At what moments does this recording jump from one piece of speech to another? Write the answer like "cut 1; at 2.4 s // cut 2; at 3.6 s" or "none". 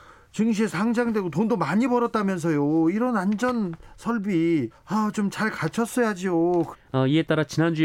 cut 1; at 4.7 s // cut 2; at 6.7 s